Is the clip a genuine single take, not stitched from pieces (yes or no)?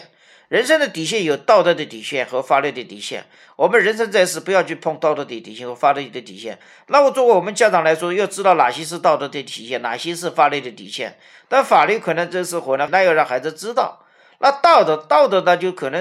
no